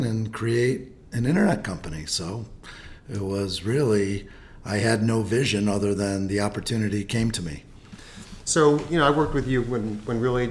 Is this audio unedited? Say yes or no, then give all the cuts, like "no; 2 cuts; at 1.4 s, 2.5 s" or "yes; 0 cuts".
yes; 0 cuts